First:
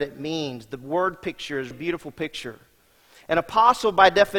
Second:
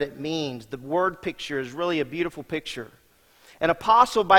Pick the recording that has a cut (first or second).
first